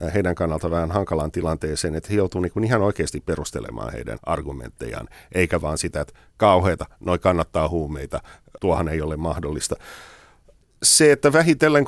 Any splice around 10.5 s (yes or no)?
no